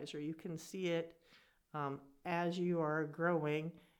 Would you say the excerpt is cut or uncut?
uncut